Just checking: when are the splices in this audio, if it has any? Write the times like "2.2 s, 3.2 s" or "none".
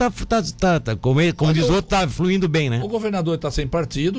none